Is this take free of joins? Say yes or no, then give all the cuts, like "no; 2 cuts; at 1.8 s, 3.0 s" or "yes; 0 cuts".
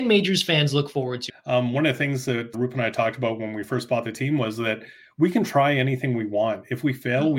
no; 2 cuts; at 1.3 s, 2.5 s